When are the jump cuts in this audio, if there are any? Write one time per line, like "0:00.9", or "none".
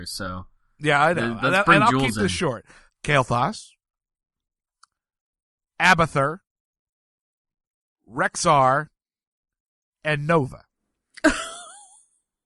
0:02.9